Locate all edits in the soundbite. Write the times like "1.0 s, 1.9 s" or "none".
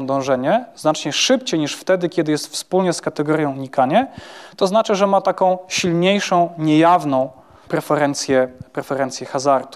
none